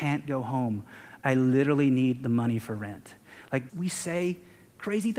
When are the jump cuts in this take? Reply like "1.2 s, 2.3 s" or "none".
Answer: 3.7 s